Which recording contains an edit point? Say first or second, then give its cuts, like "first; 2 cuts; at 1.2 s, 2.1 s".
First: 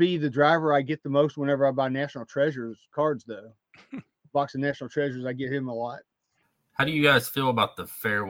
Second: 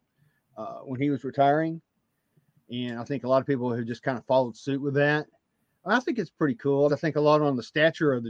second; 1 cut; at 6.9 s